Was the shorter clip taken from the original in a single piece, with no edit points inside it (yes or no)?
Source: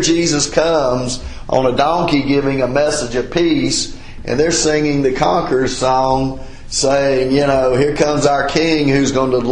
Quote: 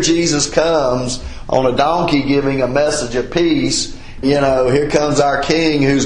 no